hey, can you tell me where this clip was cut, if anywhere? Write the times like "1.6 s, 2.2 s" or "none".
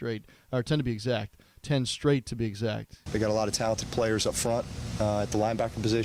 3.1 s